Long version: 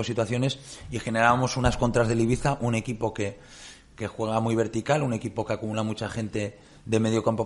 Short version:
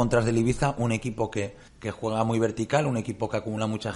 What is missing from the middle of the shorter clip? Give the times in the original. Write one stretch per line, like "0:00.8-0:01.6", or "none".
0:03.5-0:03.8